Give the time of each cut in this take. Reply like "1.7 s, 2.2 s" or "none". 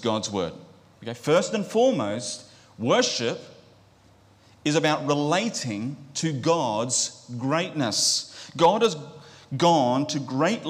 1.0 s